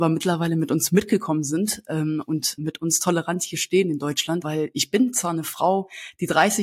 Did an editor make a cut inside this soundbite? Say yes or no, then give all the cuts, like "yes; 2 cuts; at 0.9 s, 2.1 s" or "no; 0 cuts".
yes; 2 cuts; at 2.6 s, 4.4 s